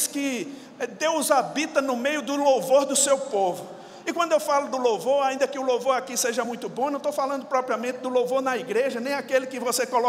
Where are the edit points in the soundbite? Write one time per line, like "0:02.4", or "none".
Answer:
none